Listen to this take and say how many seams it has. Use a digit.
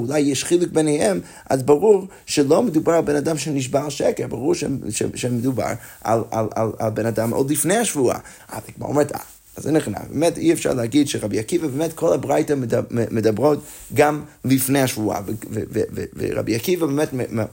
1